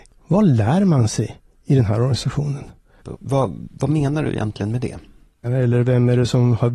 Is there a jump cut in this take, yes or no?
yes